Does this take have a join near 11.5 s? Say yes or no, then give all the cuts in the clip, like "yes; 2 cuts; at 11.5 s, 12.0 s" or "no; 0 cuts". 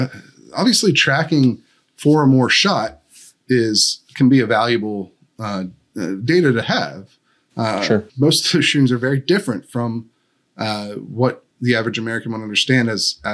yes; 2 cuts; at 8.1 s, 11.5 s